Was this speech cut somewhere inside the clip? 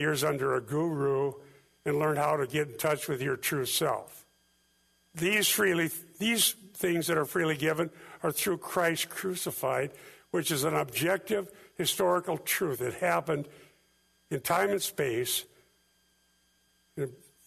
yes; 1 cut; at 5.1 s

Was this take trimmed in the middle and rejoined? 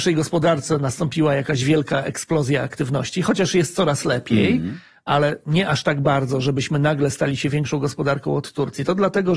no; 0 cuts

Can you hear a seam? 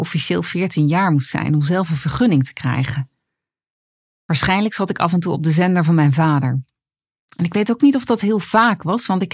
no; 0 cuts

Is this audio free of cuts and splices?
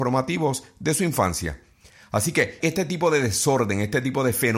no; 1 cut; at 2.6 s

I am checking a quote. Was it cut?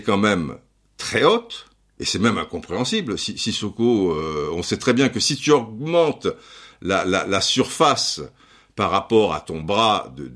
no; 0 cuts

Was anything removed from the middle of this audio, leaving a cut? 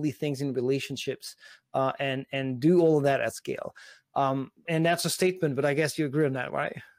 yes; 1 cut; at 4.7 s

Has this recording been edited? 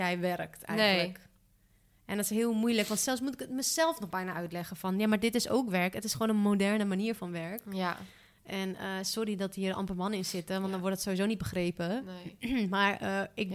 no; 0 cuts

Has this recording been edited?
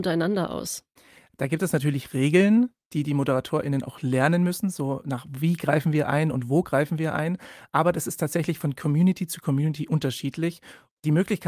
no; 0 cuts

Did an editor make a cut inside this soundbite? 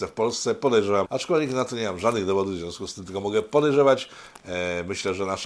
yes; 1 cut; at 1.0 s

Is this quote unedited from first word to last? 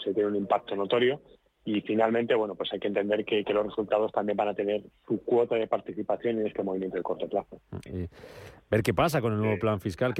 no; 1 cut; at 7.9 s

